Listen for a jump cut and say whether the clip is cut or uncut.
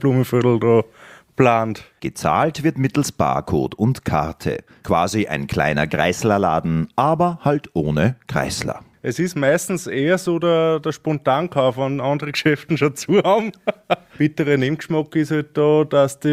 cut